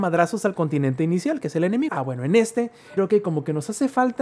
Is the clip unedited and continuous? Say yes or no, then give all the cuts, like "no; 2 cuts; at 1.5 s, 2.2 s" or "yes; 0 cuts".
no; 2 cuts; at 1.9 s, 3.0 s